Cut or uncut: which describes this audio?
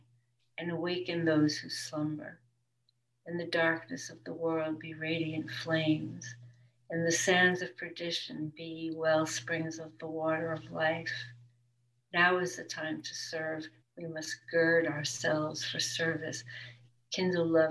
cut